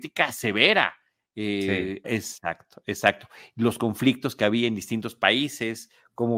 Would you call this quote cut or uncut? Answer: cut